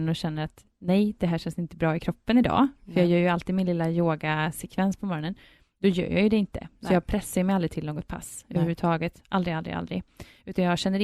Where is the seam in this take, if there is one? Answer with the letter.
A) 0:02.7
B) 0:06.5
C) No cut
C